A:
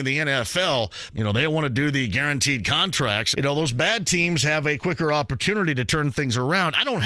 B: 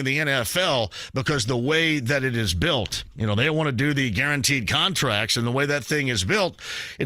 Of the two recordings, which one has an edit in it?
A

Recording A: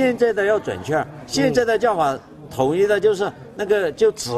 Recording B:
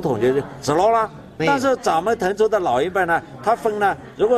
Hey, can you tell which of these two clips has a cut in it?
B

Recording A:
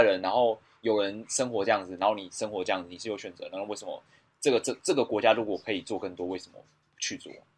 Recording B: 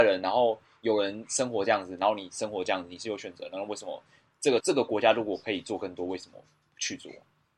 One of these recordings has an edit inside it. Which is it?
B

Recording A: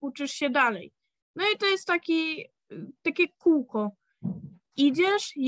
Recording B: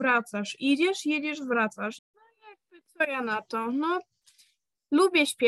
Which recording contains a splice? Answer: B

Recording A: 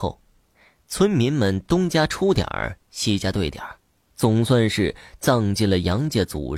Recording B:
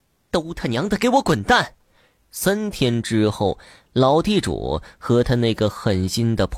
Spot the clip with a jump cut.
B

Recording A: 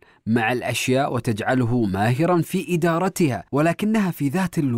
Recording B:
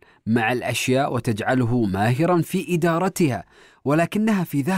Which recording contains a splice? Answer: A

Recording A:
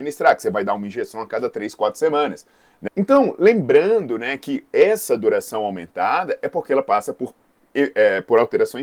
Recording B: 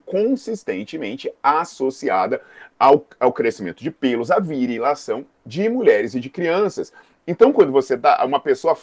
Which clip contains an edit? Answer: A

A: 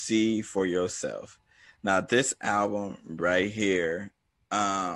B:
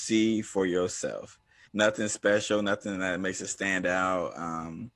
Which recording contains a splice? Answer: B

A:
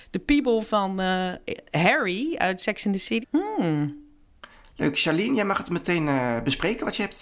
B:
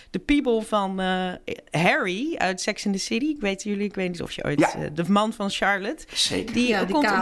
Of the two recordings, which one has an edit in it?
A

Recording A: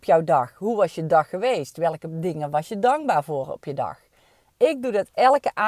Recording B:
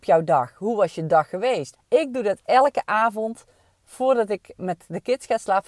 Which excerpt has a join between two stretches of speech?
B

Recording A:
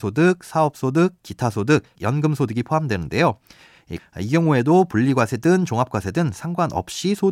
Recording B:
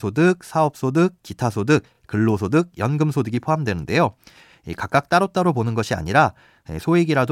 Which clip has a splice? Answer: A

